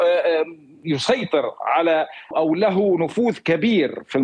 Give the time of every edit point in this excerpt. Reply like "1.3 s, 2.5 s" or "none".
2.3 s